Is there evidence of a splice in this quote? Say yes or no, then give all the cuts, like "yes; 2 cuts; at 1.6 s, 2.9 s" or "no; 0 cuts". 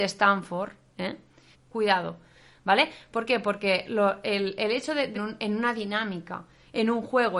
yes; 2 cuts; at 1.5 s, 5.1 s